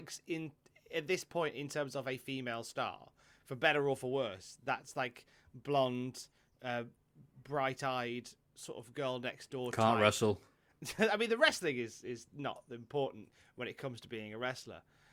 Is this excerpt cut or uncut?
uncut